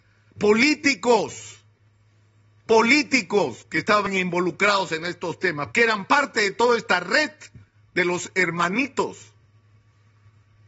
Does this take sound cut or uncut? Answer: cut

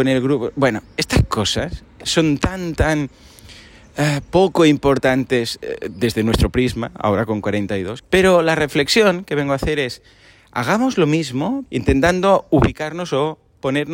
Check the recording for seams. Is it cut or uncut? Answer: cut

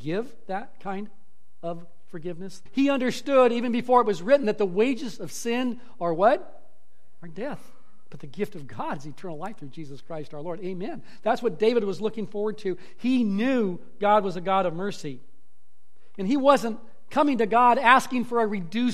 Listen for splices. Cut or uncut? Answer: cut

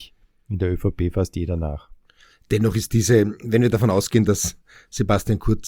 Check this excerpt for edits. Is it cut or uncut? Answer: uncut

